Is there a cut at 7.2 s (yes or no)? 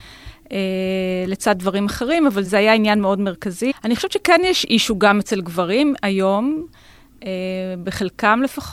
no